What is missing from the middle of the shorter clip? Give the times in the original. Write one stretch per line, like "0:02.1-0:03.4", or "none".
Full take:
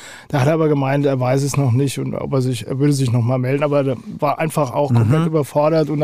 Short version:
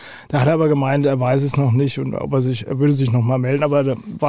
none